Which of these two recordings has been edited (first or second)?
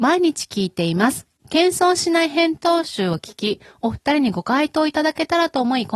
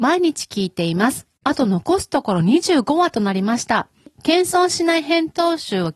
first